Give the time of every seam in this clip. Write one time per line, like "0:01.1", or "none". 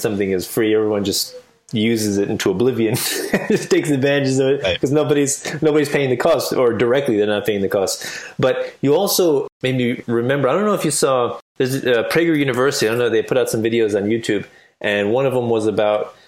none